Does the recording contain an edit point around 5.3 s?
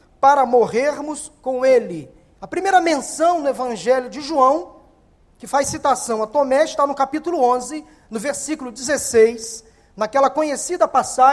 no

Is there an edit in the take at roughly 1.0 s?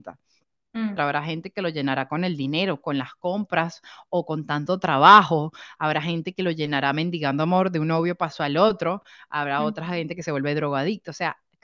yes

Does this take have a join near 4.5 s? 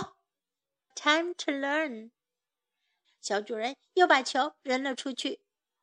no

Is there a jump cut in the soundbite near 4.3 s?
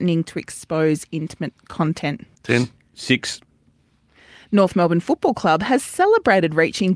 no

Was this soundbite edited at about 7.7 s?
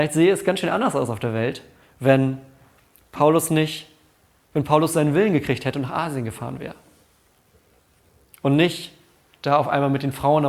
no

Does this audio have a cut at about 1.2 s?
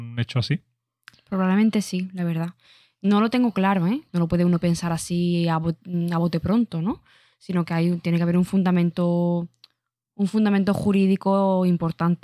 no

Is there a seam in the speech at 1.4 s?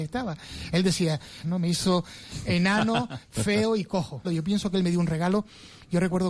yes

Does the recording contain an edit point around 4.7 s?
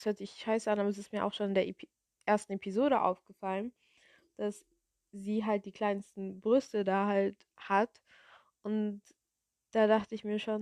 no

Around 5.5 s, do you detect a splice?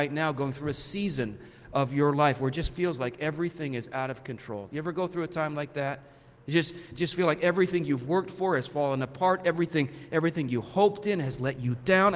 no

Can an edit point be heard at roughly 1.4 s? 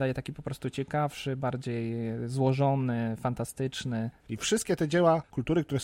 no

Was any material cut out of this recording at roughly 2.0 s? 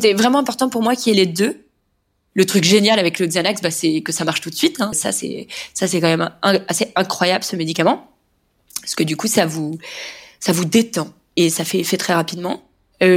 no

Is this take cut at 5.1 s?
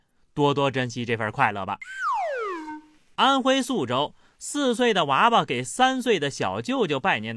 no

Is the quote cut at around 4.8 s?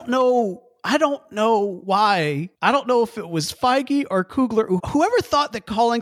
yes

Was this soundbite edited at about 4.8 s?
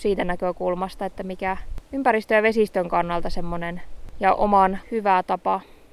yes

